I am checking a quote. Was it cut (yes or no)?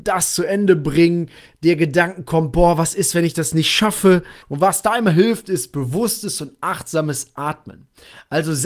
yes